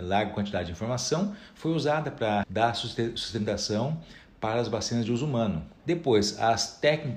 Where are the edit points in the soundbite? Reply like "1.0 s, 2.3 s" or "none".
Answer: 2.4 s, 5.8 s